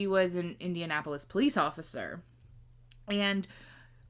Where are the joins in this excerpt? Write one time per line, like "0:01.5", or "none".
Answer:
none